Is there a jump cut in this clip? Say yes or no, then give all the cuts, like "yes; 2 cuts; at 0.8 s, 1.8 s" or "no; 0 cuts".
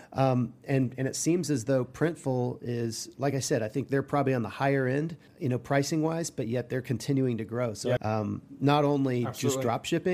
yes; 2 cuts; at 5.3 s, 8.0 s